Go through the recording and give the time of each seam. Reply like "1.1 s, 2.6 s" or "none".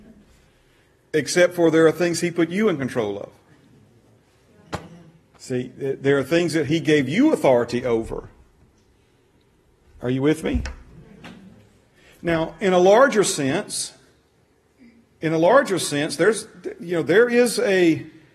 none